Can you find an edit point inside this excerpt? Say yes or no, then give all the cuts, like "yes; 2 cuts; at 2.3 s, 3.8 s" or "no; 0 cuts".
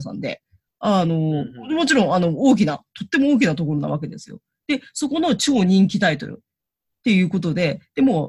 no; 0 cuts